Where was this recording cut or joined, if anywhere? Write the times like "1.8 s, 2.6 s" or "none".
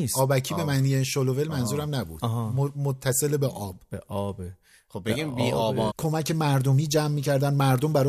5.9 s

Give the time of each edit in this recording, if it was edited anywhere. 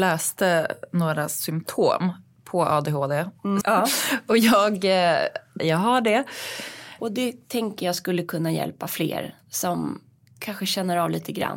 3.6 s, 5.6 s, 7.0 s

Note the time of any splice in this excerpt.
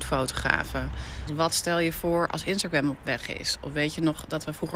1.3 s

